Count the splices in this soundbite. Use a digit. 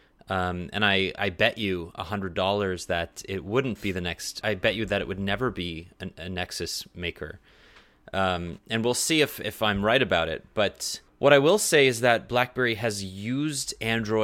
3